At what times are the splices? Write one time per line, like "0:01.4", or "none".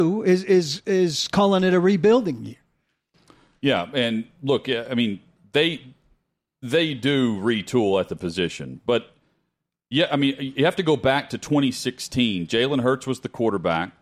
none